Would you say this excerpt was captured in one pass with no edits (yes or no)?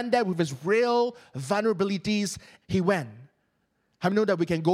no